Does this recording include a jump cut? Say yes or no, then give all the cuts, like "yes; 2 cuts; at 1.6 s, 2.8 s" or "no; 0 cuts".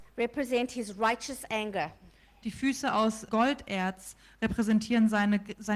yes; 1 cut; at 3.3 s